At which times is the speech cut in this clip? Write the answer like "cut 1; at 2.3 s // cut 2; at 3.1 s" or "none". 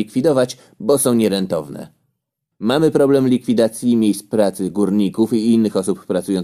cut 1; at 2.5 s

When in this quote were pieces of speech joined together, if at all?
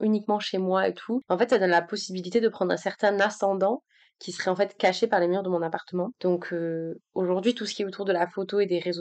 cut 1; at 6.1 s

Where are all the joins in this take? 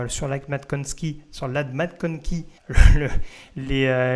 cut 1; at 2.6 s

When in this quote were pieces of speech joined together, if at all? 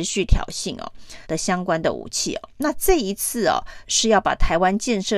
cut 1; at 1.2 s // cut 2; at 3.8 s

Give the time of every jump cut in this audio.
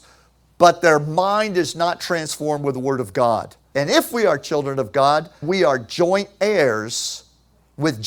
cut 1; at 3.7 s // cut 2; at 5.4 s

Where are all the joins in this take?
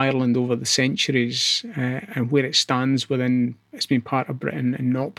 none

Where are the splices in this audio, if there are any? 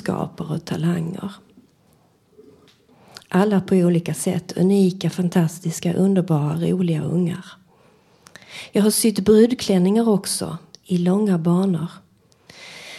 none

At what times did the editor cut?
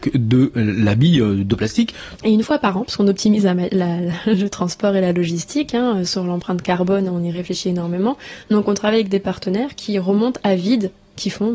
cut 1; at 2.2 s

